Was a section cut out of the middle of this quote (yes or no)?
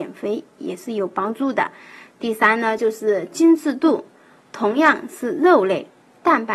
no